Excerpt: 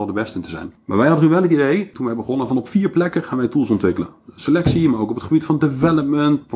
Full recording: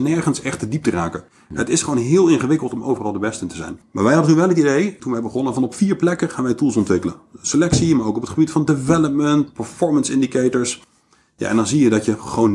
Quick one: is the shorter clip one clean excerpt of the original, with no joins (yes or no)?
yes